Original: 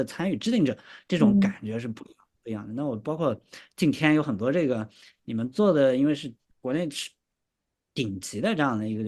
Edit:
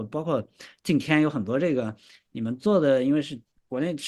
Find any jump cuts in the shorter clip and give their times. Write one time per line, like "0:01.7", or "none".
none